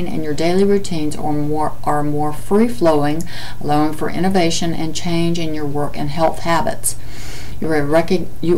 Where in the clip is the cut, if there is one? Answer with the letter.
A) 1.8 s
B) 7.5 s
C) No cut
B